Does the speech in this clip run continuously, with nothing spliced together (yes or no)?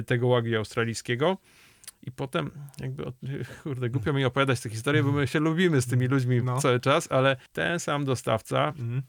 no